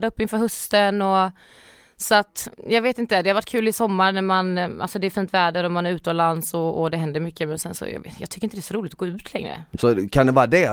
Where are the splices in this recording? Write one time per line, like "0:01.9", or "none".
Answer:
0:09.7